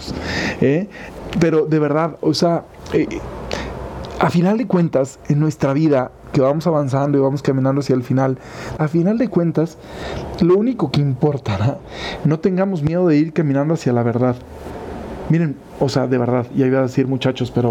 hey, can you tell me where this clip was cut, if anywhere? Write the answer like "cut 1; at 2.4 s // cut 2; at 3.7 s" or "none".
cut 1; at 8.8 s // cut 2; at 12.2 s